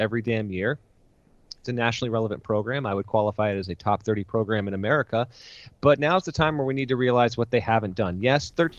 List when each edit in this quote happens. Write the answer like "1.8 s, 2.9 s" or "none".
none